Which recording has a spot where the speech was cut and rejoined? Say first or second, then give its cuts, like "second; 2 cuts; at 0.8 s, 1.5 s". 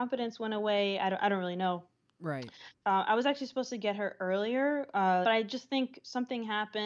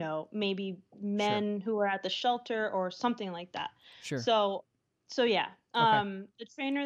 first; 2 cuts; at 2.8 s, 5.2 s